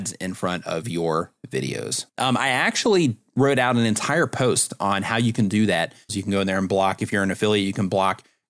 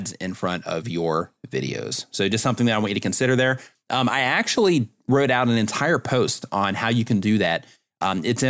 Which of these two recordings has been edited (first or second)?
first